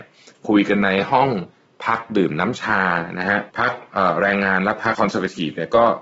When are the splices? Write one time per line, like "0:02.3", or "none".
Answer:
0:03.5
0:04.9